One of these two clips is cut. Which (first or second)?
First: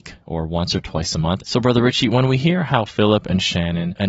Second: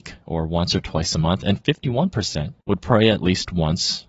first